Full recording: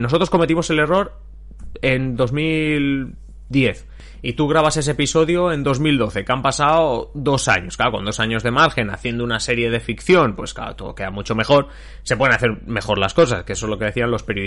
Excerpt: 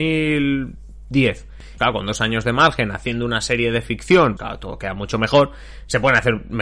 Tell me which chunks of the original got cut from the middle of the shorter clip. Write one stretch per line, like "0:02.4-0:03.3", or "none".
0:04.2-0:07.8
0:10.4-0:10.5